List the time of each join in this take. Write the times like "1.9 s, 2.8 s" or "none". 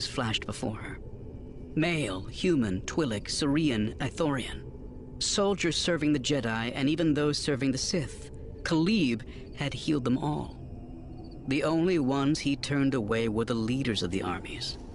2.3 s